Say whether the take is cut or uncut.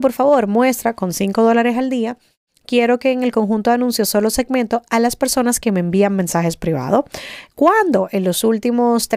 uncut